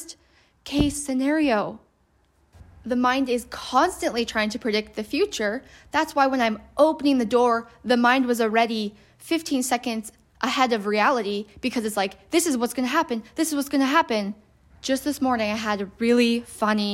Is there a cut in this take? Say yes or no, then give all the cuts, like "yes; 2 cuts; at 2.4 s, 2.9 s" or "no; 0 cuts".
yes; 1 cut; at 14.7 s